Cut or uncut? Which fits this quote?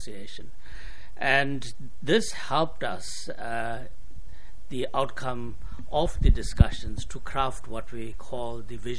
uncut